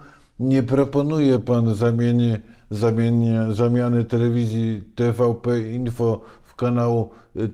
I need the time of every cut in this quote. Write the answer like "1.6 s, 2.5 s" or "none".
none